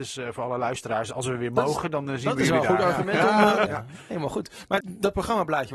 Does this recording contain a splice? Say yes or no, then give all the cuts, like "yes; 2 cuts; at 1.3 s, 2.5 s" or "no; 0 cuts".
yes; 2 cuts; at 3.7 s, 4.8 s